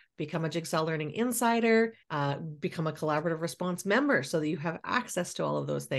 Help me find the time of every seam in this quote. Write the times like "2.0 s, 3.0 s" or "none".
2.0 s